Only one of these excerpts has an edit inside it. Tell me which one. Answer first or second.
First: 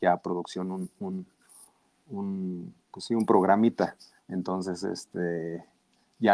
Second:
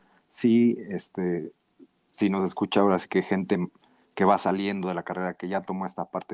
first